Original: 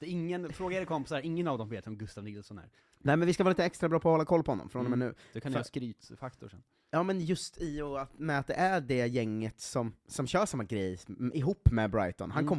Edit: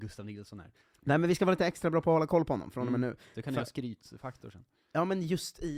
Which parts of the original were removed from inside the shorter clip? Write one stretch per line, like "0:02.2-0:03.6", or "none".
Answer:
none